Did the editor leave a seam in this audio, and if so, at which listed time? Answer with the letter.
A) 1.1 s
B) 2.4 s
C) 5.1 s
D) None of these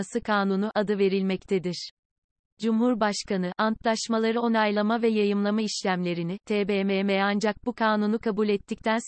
D